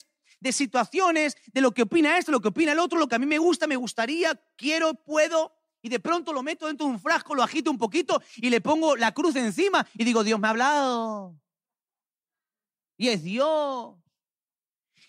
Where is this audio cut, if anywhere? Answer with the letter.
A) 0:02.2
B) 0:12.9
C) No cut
C